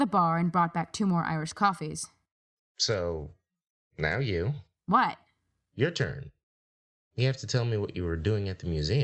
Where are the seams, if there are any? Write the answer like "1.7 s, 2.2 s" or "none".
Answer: 2.6 s